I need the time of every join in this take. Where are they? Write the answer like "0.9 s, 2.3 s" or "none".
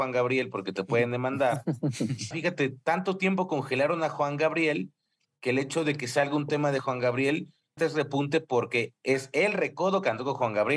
2.3 s, 7.8 s